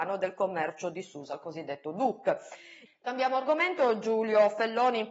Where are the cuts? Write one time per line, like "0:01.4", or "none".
0:02.9